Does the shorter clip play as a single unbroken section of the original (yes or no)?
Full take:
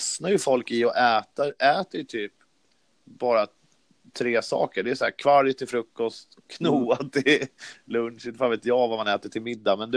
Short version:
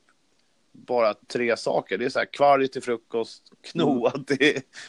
no